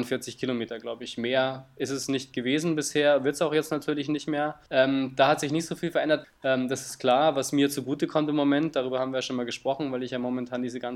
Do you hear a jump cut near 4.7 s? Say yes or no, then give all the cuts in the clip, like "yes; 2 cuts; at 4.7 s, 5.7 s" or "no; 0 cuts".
yes; 2 cuts; at 4.7 s, 6.2 s